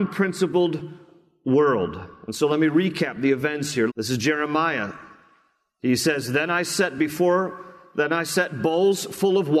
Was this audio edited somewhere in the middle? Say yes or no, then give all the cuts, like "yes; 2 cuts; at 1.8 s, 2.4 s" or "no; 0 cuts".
yes; 1 cut; at 3.9 s